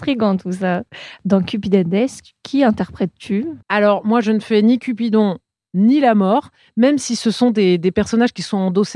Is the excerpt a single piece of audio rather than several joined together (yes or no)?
no